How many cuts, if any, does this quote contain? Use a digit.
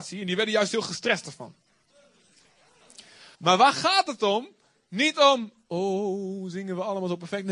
1